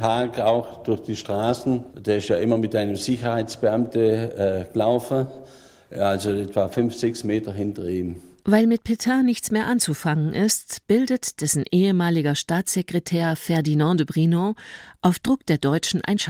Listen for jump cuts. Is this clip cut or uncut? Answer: uncut